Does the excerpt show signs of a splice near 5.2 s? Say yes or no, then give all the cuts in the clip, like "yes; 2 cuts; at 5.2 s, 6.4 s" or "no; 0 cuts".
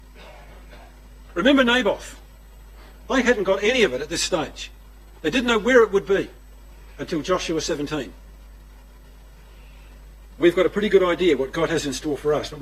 no; 1 cut; at 3.0 s